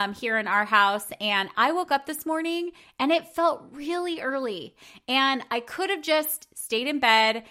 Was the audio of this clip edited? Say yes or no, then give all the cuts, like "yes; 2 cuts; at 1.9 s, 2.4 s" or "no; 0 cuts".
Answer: no; 0 cuts